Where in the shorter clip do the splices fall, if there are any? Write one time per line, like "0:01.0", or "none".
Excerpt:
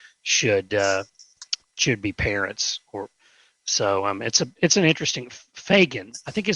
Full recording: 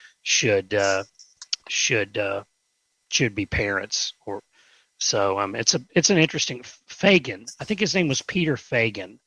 0:01.6